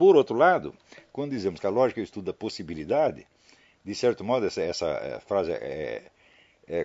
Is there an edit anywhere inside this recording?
no; 0 cuts

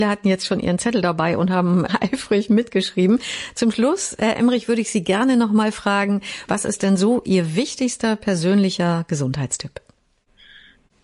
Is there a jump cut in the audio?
yes; 1 cut; at 6.5 s

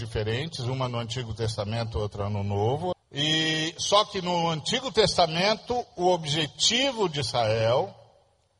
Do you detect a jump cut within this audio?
yes; 1 cut; at 2.9 s

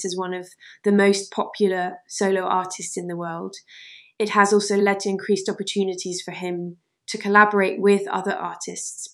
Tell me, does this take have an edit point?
no; 0 cuts

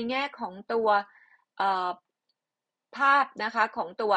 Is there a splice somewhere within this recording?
no; 0 cuts

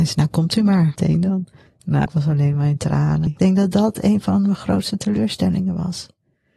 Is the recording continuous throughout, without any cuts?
no; 2 cuts; at 2.1 s, 3.3 s

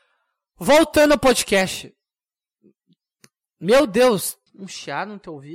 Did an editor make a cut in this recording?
yes; 1 cut; at 4.5 s

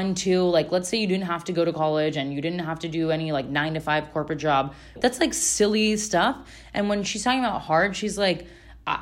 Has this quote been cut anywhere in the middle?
yes; 1 cut; at 5.0 s

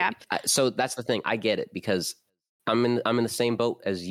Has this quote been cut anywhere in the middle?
no; 0 cuts

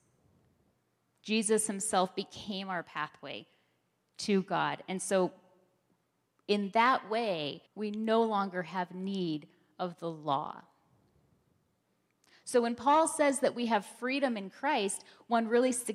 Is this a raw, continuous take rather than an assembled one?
no; 1 cut; at 7.7 s

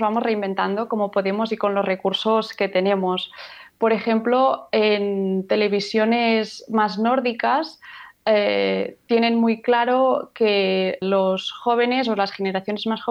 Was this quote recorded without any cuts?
no; 1 cut; at 11.0 s

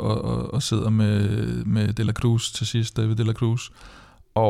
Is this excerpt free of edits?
yes; 0 cuts

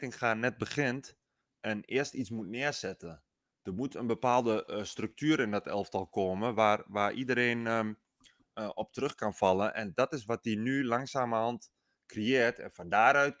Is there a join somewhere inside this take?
no; 0 cuts

